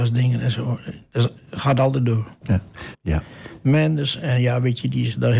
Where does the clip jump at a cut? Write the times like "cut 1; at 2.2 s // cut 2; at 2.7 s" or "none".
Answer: cut 1; at 2.9 s